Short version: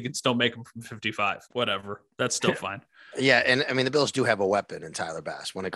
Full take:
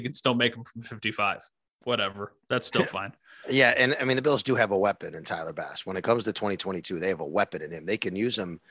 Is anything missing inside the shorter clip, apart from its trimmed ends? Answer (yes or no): yes